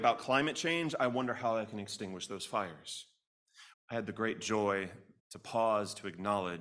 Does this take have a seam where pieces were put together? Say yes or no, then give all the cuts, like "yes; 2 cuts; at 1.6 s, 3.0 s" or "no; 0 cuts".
yes; 2 cuts; at 3.7 s, 5.2 s